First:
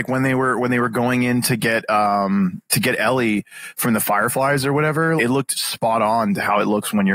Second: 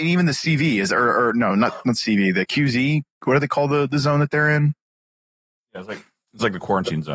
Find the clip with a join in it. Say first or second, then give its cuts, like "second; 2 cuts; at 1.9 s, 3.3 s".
first; 1 cut; at 5.2 s